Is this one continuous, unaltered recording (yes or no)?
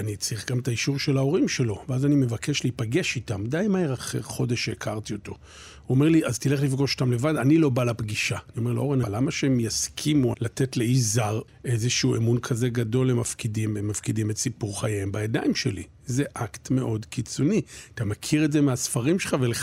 no